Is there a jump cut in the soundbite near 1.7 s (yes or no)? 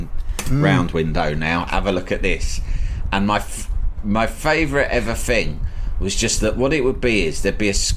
no